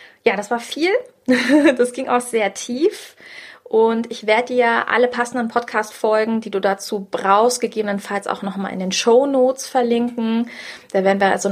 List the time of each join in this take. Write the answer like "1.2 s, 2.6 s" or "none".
none